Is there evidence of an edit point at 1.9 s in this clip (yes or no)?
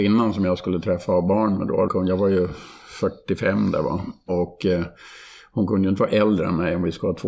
yes